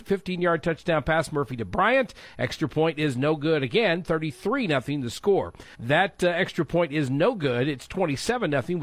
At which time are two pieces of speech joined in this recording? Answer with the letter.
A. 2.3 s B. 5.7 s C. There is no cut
B